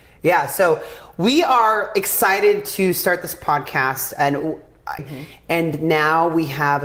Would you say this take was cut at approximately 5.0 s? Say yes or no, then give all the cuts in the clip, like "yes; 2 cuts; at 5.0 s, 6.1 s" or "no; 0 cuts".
yes; 1 cut; at 5.0 s